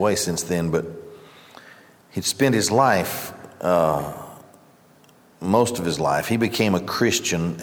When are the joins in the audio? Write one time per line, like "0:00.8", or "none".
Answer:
none